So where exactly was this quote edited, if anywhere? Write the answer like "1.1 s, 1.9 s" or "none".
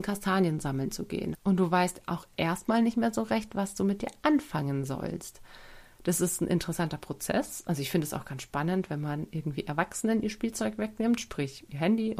1.3 s